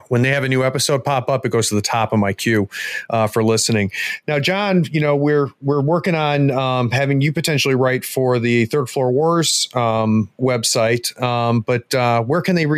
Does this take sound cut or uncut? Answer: uncut